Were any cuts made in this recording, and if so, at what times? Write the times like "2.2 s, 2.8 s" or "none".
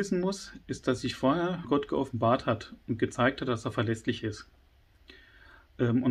1.6 s